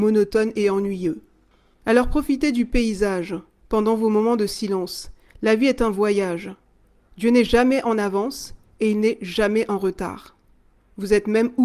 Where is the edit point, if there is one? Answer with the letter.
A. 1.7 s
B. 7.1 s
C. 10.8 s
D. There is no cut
C